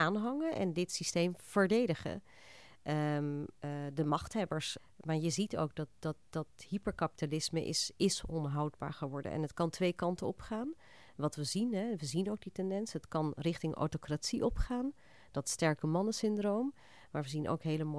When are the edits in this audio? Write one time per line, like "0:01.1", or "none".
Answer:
none